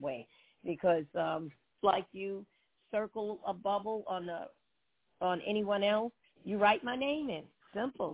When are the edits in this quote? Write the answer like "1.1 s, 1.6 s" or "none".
1.8 s